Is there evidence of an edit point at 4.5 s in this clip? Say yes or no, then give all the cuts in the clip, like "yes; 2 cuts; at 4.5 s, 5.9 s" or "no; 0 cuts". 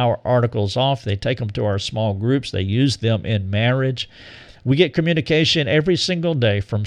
no; 0 cuts